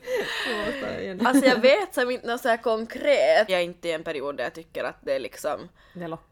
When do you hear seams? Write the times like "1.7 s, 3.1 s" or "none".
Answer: 1.2 s, 3.5 s